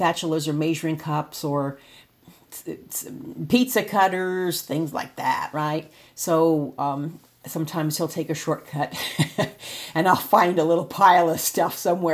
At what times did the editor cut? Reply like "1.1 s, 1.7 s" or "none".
none